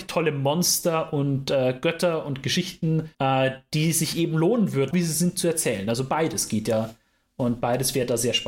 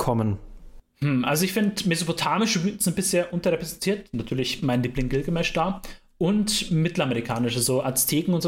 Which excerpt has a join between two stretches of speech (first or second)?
first